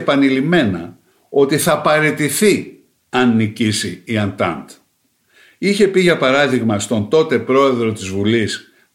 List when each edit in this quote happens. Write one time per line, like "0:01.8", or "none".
none